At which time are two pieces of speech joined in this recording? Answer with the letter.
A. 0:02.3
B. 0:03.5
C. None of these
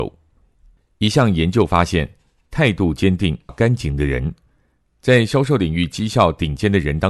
B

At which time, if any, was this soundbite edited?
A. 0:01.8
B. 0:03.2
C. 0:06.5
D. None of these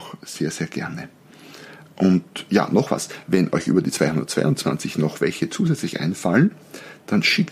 D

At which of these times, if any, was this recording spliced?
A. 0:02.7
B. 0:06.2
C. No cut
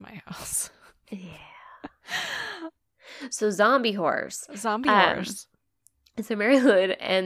A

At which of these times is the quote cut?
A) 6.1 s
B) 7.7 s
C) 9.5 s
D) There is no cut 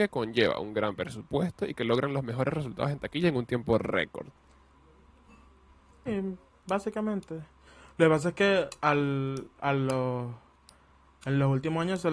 A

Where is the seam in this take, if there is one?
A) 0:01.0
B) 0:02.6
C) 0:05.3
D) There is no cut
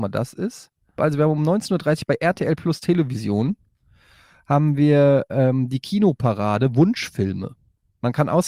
A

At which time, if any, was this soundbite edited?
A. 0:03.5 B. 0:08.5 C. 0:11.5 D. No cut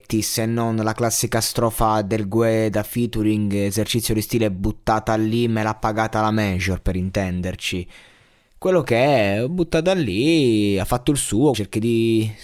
C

